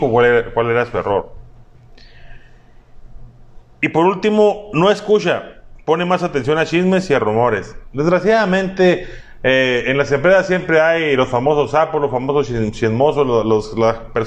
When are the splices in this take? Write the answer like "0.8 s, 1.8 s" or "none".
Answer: none